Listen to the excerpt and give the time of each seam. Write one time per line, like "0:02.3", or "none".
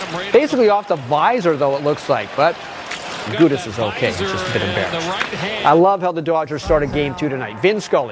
0:03.3

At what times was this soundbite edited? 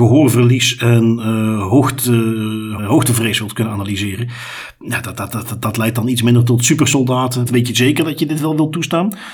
0:02.8
0:07.5

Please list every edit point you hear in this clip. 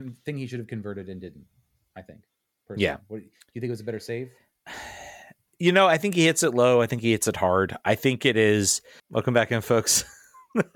0:09.0

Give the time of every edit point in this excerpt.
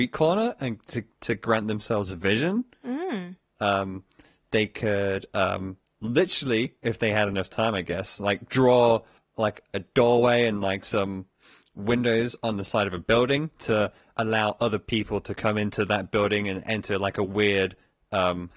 none

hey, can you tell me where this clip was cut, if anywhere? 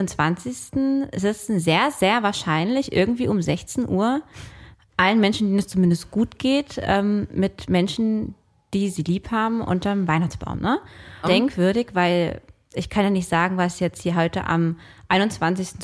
0:11.2

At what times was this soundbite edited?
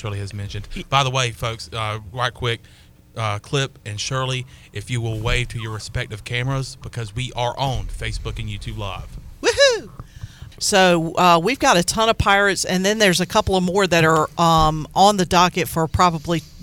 0:10.5

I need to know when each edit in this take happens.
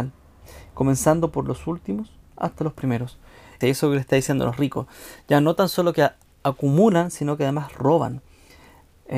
0:03.6

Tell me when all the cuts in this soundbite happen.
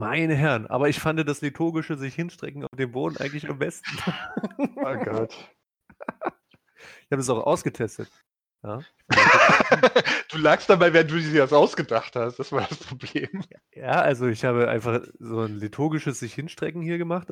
none

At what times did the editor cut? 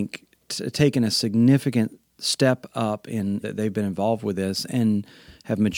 0:02.2
0:03.4

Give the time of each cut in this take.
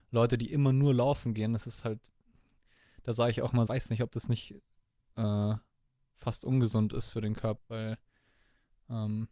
0:03.7
0:07.6

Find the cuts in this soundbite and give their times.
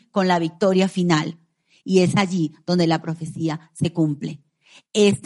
0:01.8

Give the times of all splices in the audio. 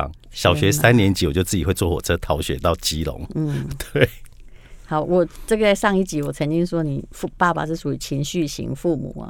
none

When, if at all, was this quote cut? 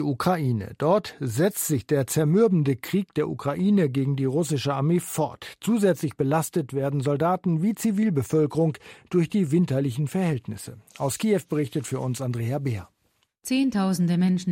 none

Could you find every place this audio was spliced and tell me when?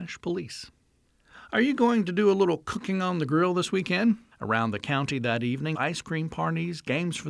0:04.3
0:05.7

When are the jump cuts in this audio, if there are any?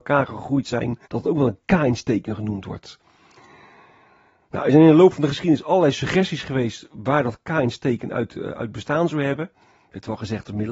0:01.1

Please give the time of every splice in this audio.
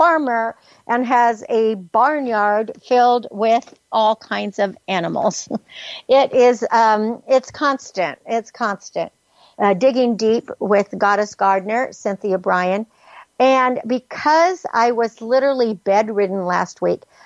0:09.5

